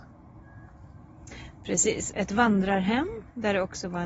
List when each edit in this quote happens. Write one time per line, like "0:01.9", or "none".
0:02.1